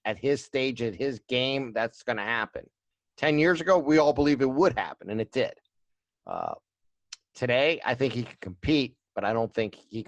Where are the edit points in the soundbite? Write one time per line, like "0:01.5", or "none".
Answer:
none